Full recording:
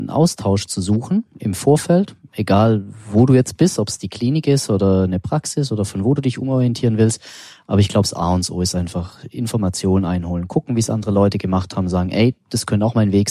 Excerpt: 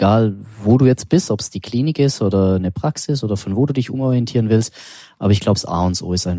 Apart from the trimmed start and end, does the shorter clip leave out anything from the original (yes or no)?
no